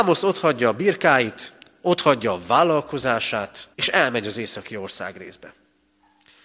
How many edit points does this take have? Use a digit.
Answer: 1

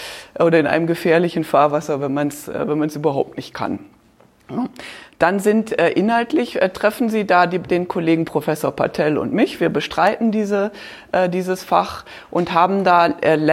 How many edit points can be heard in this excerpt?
0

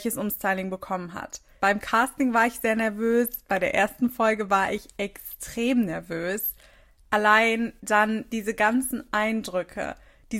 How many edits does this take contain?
1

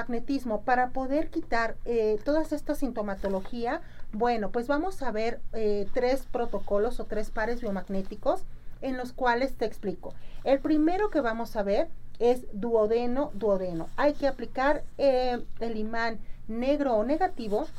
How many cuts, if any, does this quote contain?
0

